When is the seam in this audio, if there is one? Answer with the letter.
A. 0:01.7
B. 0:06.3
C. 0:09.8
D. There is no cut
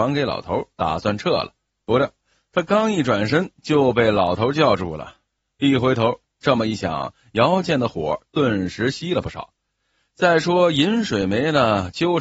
B